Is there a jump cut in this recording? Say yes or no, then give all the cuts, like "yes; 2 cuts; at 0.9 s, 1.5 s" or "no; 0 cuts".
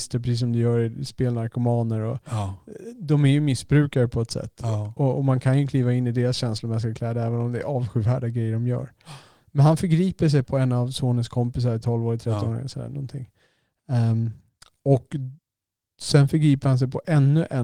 yes; 2 cuts; at 10.4 s, 11.8 s